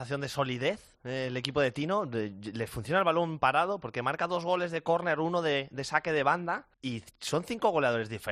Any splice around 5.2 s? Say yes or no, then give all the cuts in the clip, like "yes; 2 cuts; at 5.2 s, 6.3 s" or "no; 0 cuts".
no; 2 cuts; at 1.0 s, 6.7 s